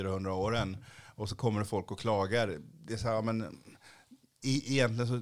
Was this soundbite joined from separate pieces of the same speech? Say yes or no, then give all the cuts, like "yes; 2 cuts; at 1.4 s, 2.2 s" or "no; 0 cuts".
no; 0 cuts